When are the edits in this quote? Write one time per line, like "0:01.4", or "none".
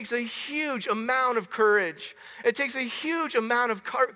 none